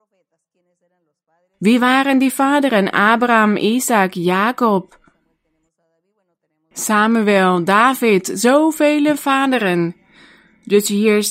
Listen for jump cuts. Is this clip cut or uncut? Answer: uncut